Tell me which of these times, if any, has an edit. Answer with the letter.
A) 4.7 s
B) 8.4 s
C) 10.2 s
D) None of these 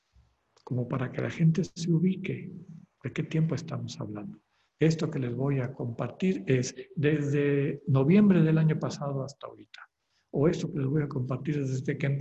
A